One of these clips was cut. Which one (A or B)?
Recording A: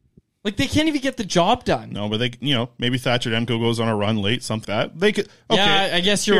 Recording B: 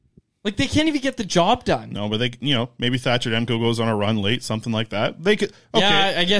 A